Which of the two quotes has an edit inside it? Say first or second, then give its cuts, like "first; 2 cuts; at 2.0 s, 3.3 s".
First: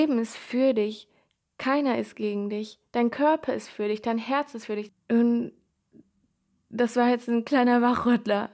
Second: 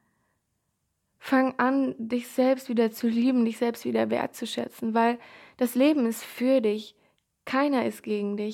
first; 1 cut; at 4.9 s